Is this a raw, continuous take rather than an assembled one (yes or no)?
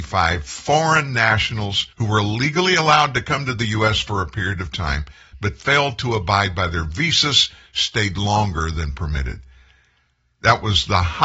no